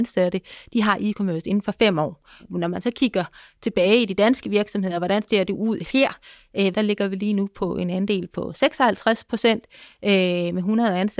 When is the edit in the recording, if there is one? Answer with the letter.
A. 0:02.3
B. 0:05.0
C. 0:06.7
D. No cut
C